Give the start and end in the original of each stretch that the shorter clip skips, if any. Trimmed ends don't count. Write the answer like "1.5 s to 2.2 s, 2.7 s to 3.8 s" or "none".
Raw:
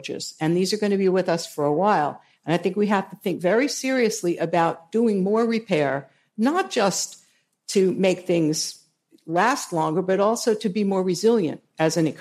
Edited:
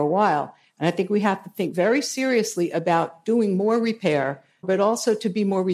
6.3 s to 10.0 s